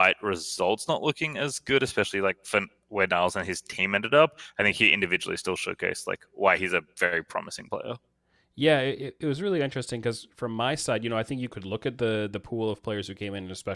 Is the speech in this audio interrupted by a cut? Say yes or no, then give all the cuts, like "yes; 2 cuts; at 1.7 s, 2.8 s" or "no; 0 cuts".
no; 0 cuts